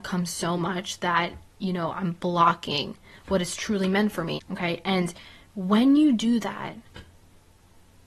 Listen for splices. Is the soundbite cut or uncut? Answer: cut